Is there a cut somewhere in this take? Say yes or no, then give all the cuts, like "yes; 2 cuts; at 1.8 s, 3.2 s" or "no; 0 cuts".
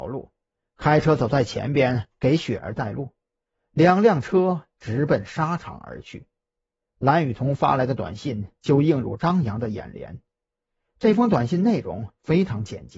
yes; 1 cut; at 6.9 s